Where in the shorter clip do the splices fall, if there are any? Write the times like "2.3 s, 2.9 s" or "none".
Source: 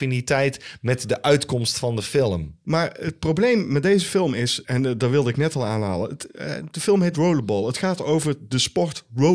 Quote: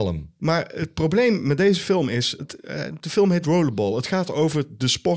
2.4 s